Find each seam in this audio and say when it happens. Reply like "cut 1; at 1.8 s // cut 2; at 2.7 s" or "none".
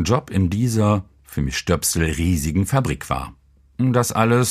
none